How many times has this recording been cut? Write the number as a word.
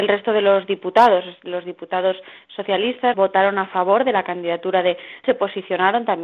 two